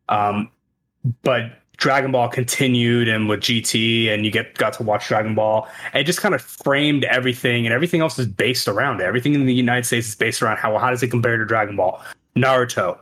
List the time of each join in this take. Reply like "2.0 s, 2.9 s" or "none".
none

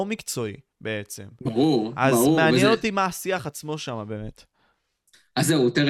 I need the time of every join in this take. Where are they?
none

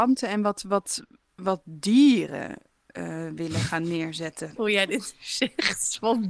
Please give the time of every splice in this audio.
4.6 s

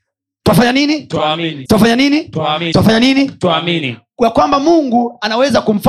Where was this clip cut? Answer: 1.7 s, 2.7 s

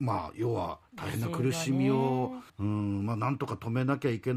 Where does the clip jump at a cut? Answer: 2.5 s

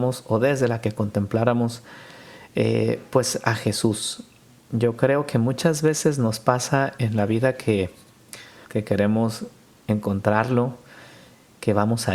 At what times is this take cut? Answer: 8.6 s

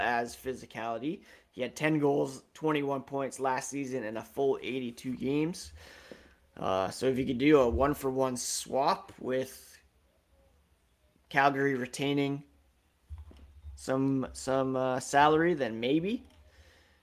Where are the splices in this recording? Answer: none

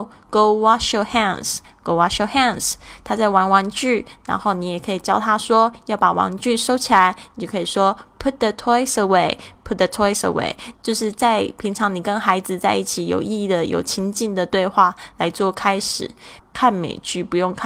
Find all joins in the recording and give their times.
10.7 s, 16.4 s

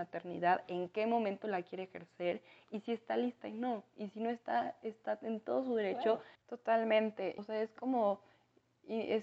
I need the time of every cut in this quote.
6.4 s, 7.4 s

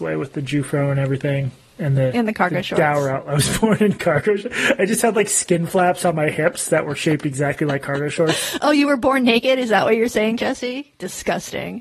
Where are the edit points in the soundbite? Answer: none

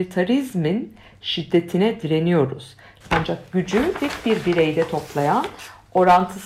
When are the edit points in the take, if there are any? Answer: 3.0 s

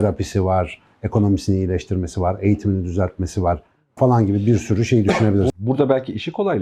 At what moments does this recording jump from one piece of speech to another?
4.0 s

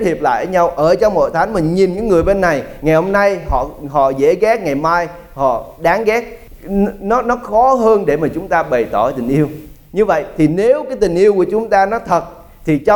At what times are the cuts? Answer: none

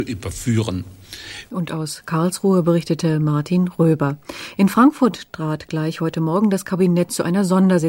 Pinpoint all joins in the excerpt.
1.5 s

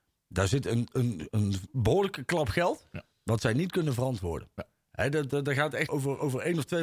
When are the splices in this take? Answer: 1.3 s, 5.9 s

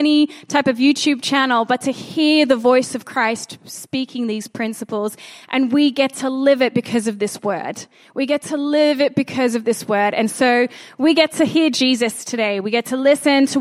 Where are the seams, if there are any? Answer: none

